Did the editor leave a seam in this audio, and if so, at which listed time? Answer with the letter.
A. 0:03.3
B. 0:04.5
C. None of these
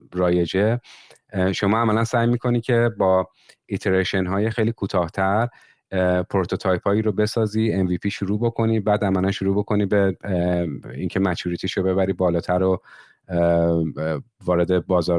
B